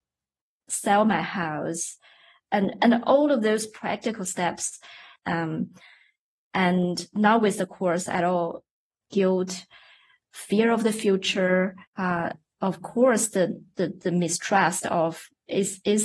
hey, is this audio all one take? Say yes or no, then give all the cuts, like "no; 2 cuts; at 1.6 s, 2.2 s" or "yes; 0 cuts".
no; 3 cuts; at 5.2 s, 9.0 s, 11.9 s